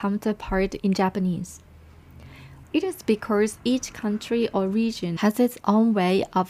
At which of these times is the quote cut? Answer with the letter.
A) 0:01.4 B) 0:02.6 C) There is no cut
B